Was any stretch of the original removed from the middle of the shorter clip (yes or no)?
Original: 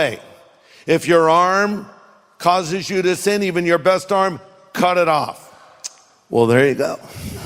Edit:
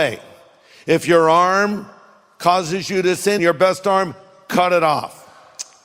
yes